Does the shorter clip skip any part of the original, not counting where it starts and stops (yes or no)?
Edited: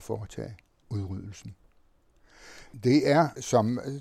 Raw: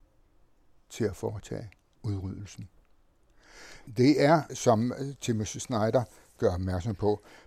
no